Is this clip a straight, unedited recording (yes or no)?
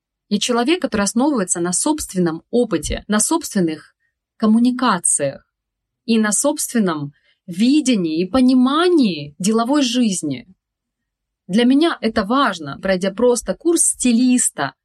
no